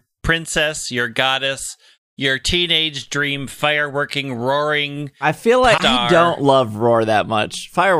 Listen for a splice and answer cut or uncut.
cut